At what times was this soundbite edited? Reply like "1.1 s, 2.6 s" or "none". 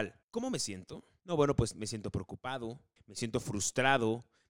3.0 s

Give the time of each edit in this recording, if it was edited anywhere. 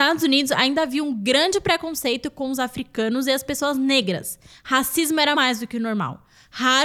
5.3 s

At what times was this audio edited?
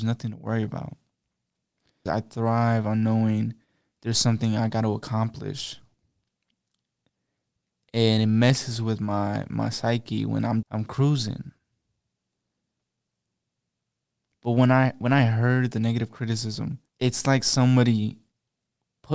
2.1 s, 10.6 s, 16.9 s

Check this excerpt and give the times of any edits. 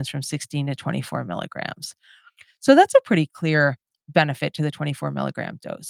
none

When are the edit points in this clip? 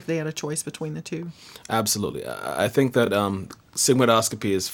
none

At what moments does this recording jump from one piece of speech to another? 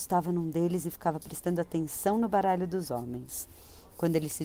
none

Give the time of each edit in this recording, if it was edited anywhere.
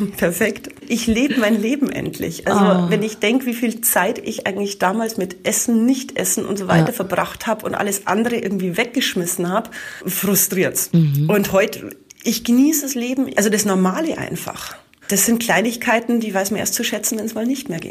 13.3 s, 15.0 s

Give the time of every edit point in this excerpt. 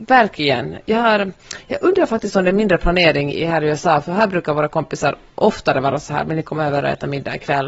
3.3 s

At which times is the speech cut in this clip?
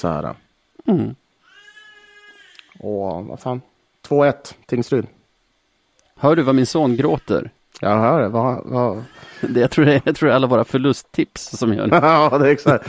none

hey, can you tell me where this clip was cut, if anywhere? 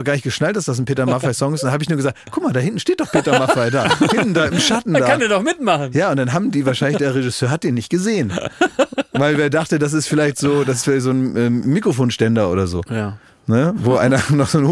none

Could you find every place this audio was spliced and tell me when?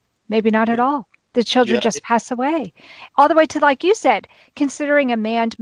none

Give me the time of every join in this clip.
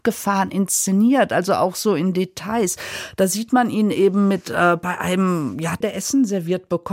5.8 s

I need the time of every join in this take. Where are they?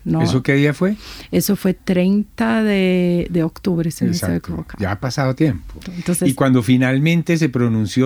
5.8 s

